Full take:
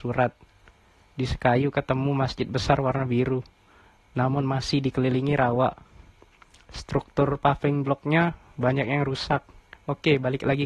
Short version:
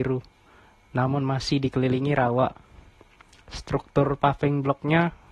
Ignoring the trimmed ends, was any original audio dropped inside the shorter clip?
no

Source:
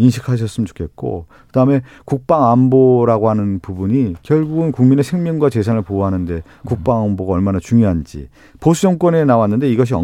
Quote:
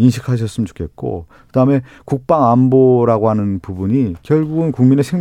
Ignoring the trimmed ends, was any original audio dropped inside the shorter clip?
no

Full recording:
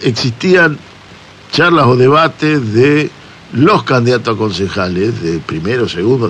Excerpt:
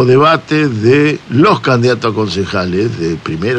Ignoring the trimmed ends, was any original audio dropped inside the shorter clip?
yes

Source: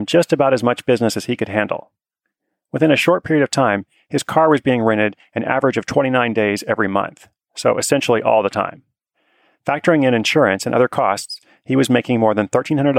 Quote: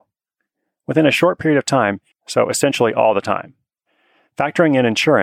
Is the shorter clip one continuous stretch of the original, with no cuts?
no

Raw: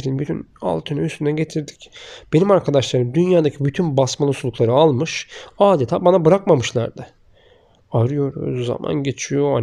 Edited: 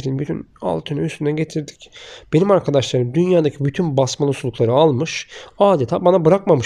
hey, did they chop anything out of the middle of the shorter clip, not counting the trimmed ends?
no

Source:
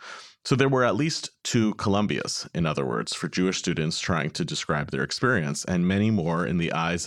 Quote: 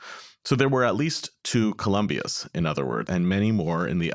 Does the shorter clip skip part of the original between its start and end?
yes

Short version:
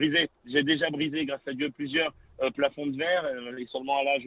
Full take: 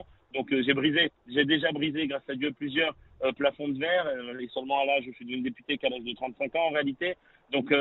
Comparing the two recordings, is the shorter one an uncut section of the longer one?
yes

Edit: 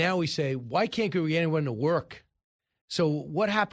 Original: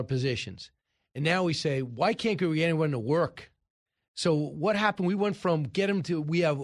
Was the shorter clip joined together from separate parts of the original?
no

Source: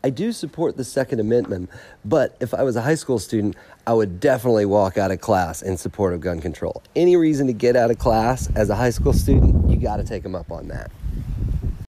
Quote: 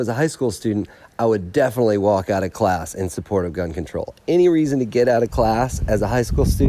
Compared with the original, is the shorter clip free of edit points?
yes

